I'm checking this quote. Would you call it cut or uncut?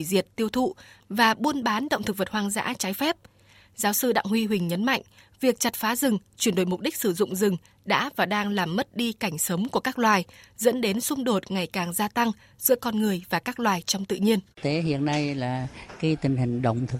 cut